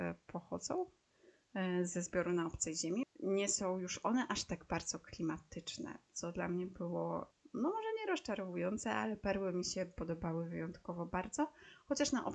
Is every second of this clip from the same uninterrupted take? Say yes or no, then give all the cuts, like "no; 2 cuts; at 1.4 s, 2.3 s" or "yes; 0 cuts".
no; 1 cut; at 3.0 s